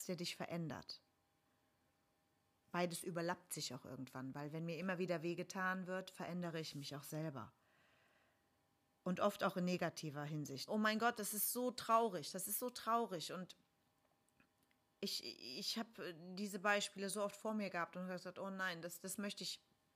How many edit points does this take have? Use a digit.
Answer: 1